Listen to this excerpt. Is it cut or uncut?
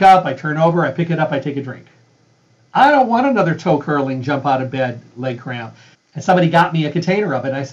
cut